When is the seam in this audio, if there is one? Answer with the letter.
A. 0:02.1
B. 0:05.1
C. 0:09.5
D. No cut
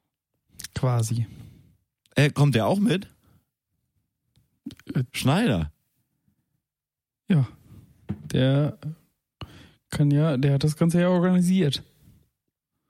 B